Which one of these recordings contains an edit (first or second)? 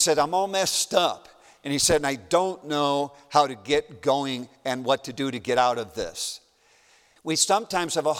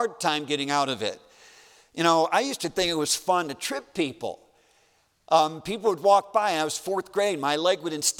first